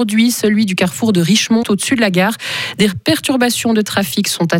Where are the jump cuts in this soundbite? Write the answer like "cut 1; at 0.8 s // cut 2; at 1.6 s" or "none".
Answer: cut 1; at 1.6 s